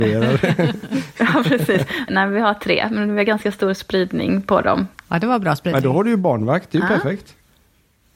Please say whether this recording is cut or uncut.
cut